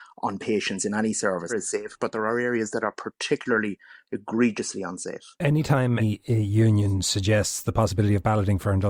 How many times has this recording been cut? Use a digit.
2